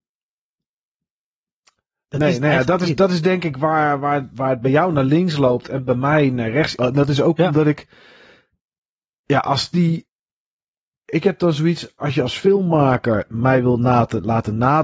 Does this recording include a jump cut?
yes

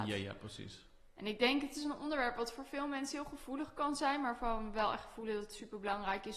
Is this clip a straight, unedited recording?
yes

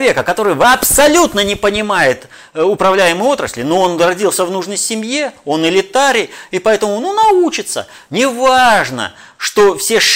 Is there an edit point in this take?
no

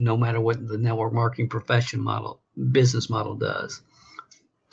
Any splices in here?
no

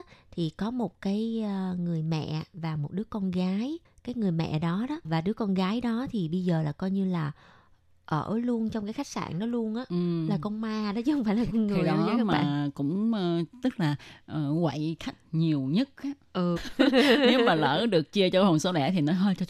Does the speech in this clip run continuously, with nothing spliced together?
no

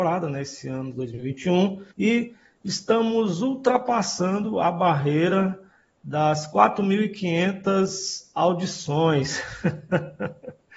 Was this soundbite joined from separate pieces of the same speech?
yes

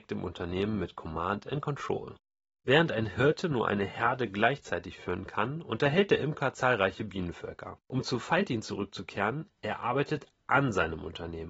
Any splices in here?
yes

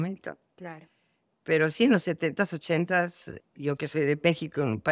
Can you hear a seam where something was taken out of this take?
yes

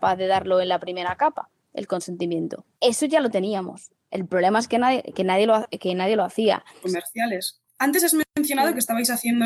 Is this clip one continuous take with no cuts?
no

